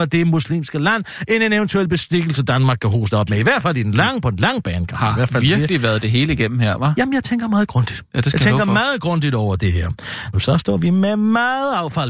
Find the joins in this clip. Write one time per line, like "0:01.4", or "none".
0:10.3